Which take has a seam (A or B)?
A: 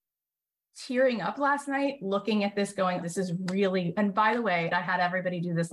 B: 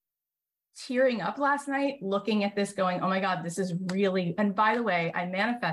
A